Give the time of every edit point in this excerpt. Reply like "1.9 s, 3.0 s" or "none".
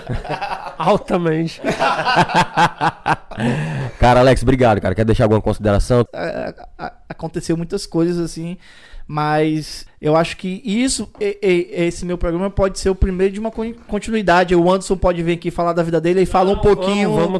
6.1 s, 9.9 s